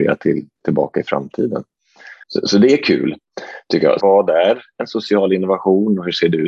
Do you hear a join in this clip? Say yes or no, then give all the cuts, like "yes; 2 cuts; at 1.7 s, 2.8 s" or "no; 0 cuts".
yes; 2 cuts; at 2.2 s, 4.0 s